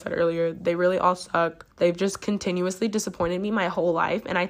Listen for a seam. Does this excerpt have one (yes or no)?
yes